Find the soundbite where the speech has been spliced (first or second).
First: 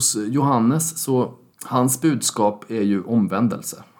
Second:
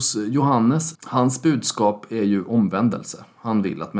second